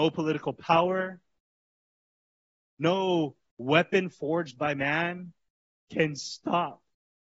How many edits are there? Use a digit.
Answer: 0